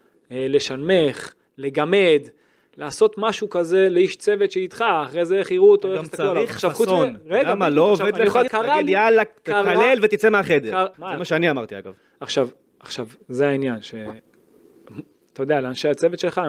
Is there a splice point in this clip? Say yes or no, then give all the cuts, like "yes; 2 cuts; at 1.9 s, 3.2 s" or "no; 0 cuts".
yes; 2 cuts; at 8.5 s, 10.9 s